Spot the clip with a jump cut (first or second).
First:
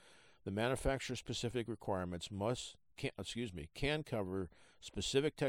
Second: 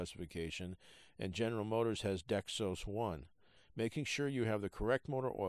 second